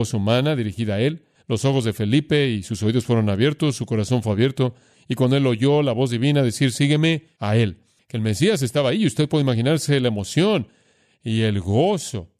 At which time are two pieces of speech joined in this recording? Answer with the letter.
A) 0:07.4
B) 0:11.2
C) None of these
A